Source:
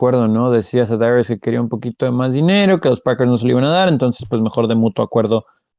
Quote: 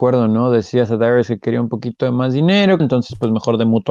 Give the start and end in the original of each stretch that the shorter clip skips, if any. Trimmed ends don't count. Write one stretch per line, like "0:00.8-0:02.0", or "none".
0:02.8-0:03.9